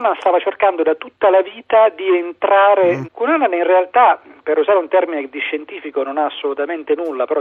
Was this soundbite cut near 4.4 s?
no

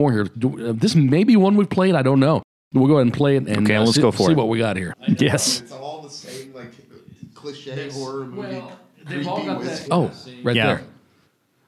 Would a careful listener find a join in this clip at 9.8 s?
yes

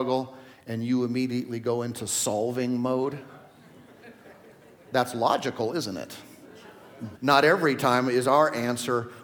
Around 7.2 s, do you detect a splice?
yes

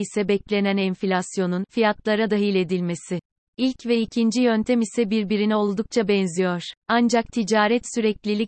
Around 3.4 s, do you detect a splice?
yes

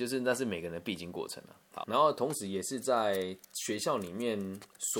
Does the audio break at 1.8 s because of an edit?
yes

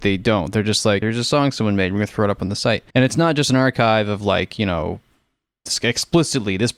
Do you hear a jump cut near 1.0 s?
yes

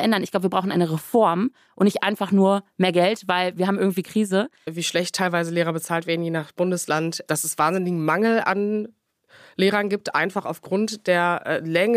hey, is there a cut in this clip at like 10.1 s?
no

